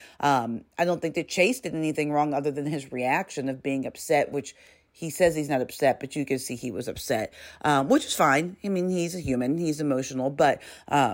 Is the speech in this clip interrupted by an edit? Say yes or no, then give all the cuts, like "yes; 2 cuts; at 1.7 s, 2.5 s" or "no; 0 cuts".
no; 0 cuts